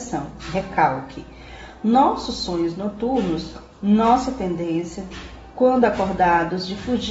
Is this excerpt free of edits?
yes; 0 cuts

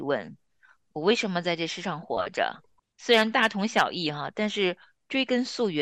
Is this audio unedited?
no; 1 cut; at 2.8 s

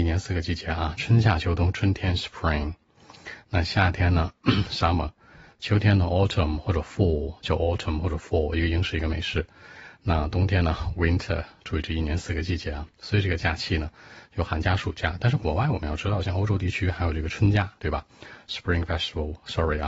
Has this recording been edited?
yes; 1 cut; at 17.8 s

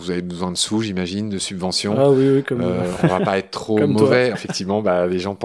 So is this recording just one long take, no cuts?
no; 1 cut; at 4.3 s

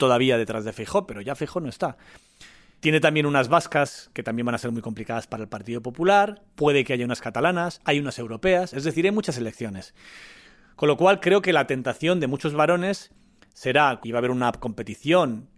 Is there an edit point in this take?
yes; 1 cut; at 14.0 s

